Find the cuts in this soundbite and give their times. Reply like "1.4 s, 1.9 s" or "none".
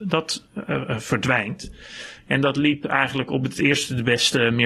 2.2 s